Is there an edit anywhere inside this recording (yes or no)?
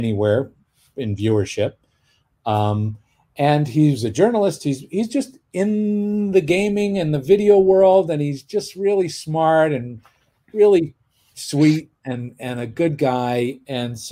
no